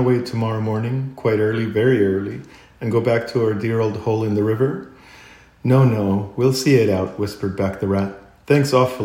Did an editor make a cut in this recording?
no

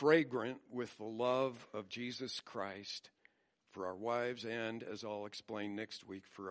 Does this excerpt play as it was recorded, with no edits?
no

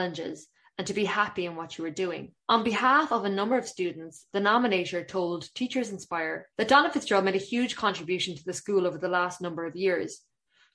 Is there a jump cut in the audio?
yes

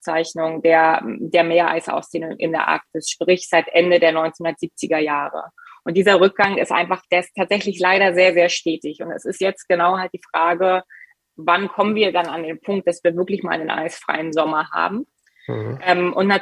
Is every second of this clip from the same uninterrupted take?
yes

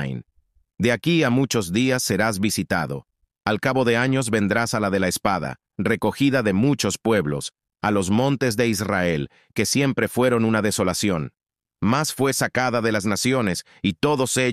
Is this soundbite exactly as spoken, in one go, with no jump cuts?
yes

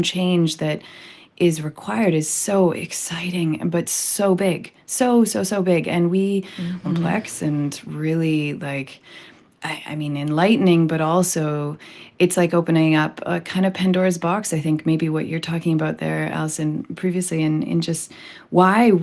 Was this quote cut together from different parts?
yes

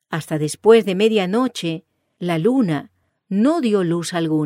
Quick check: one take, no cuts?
no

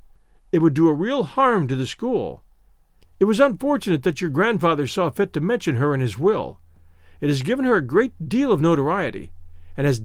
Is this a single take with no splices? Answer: no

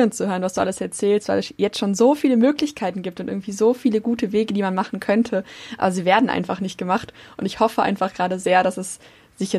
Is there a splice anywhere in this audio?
yes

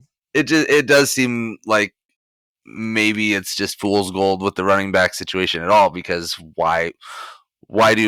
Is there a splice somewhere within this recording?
no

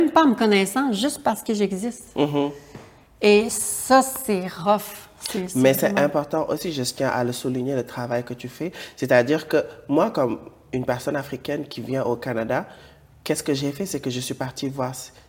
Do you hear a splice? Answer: no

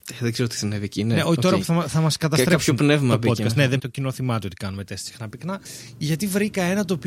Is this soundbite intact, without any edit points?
no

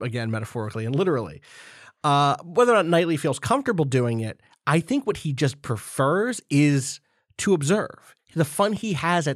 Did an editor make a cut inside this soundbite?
no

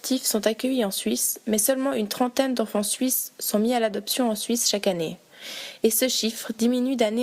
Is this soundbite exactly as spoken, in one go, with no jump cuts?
yes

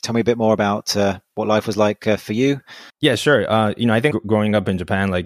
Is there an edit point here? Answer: yes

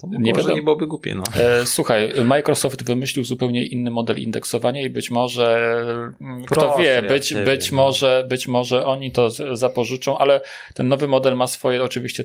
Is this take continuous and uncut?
yes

